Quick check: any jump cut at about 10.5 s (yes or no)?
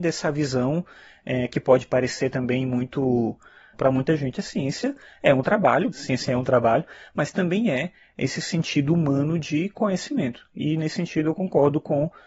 no